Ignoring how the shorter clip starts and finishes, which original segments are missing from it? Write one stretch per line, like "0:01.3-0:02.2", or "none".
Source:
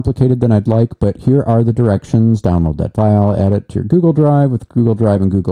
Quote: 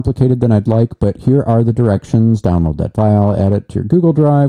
none